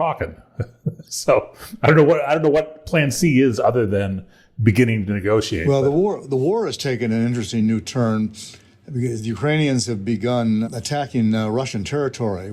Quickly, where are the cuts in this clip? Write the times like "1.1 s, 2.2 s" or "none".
none